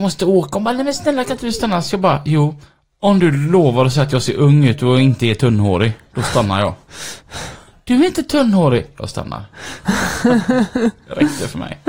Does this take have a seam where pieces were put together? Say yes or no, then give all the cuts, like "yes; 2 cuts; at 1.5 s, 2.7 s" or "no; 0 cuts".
no; 0 cuts